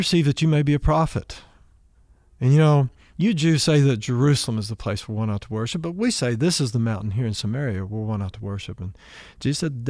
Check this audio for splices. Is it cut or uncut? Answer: uncut